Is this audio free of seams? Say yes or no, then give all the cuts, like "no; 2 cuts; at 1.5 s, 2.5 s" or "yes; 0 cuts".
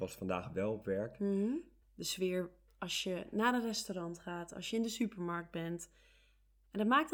no; 1 cut; at 1.8 s